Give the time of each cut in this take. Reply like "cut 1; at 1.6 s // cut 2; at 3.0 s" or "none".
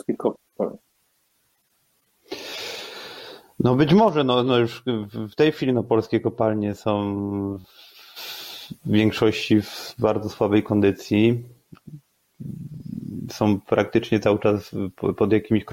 none

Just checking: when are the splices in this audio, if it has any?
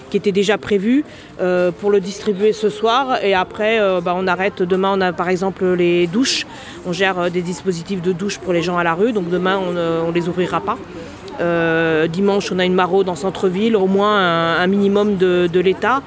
cut 1; at 13.8 s

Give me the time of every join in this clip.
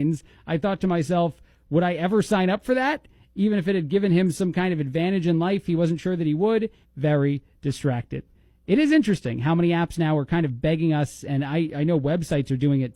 cut 1; at 6.8 s

